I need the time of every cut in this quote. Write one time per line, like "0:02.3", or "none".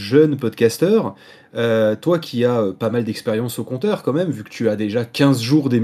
none